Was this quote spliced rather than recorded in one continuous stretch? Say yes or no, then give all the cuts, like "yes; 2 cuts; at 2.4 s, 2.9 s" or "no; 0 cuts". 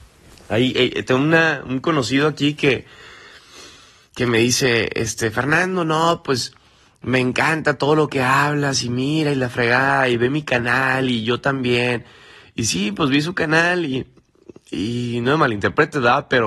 no; 0 cuts